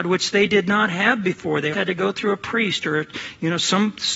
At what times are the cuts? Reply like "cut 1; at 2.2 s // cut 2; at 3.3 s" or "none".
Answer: cut 1; at 1.7 s